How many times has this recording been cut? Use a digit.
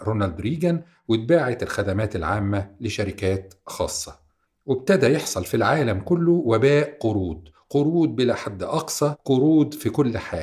0